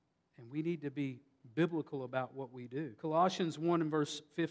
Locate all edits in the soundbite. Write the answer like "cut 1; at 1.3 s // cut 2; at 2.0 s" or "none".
cut 1; at 3.0 s